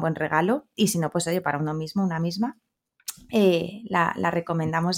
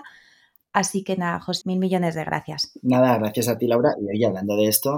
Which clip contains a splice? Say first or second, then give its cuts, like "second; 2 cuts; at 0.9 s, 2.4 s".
second; 1 cut; at 1.6 s